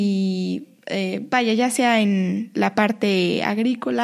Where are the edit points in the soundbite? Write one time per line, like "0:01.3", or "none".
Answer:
none